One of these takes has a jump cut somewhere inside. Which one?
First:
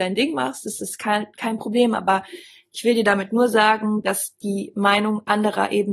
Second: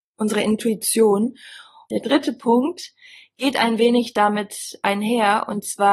second; 1 cut; at 1.9 s

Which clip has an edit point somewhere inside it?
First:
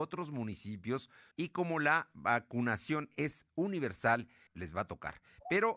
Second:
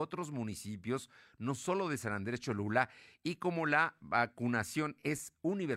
first; 2 cuts; at 1.3 s, 4.5 s

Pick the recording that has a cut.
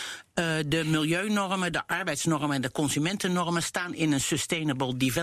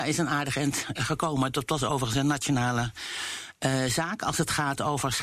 second; 1 cut; at 0.9 s

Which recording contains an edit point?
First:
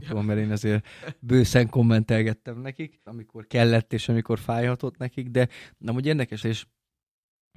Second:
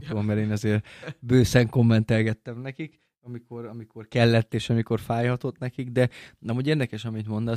first; 2 cuts; at 3.1 s, 6.4 s

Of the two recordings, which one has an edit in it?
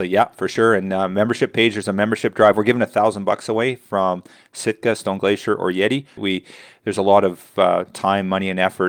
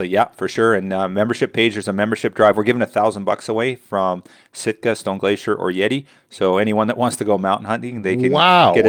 first; 1 cut; at 6.2 s

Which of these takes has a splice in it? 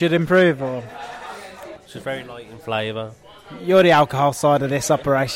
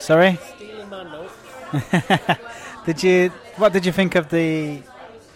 first; 1 cut; at 1.8 s

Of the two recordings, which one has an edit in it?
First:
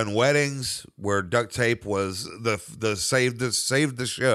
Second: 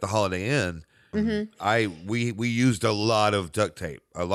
second; 1 cut; at 1.1 s

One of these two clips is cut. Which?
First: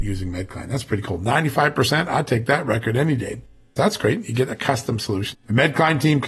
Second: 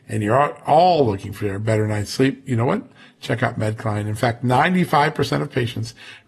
first; 2 cuts; at 3.8 s, 5.3 s

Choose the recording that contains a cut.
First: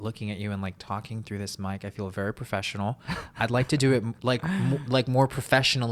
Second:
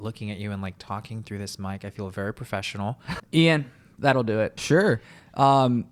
second; 2 cuts; at 3.2 s, 4.6 s

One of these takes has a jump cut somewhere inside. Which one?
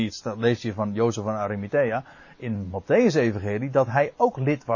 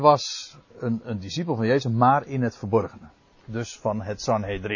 second; 2 cuts; at 1.0 s, 3.3 s

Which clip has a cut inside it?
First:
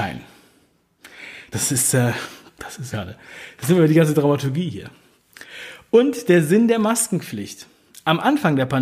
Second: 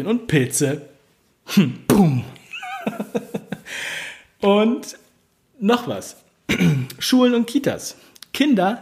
first; 2 cuts; at 1.5 s, 2.9 s

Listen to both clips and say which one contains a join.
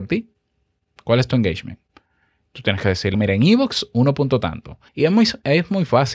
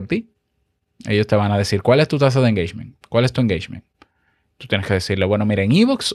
first; 3 cuts; at 0.9 s, 3.1 s, 4.9 s

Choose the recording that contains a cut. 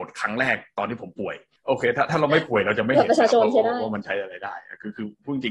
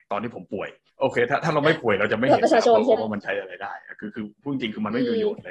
second; 1 cut; at 3.0 s

